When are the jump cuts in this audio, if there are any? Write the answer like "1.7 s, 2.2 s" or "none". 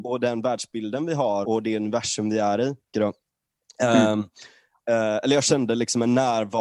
1.4 s, 2.9 s